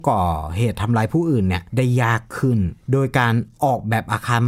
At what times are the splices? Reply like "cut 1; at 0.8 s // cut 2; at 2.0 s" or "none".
cut 1; at 1.7 s // cut 2; at 2.8 s